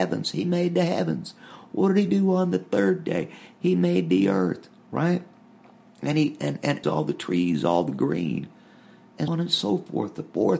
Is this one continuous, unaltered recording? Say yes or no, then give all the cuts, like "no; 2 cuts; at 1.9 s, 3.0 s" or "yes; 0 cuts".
no; 2 cuts; at 6.8 s, 9.3 s